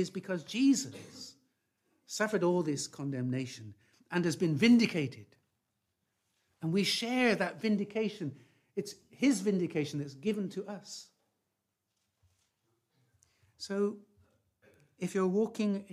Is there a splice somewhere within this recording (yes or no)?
no